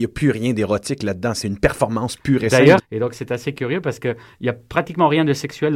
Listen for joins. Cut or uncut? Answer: cut